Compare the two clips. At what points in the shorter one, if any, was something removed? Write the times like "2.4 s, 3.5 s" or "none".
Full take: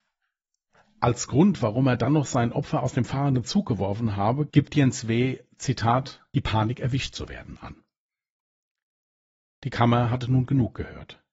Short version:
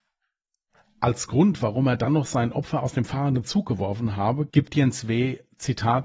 none